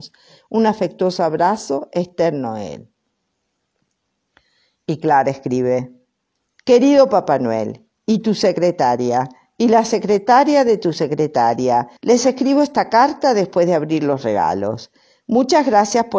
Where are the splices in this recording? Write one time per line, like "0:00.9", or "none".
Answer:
0:12.0

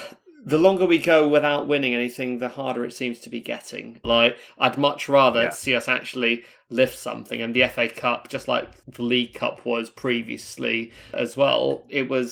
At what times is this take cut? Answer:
0:04.0

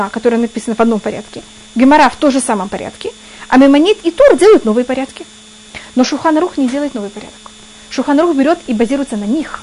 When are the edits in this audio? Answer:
none

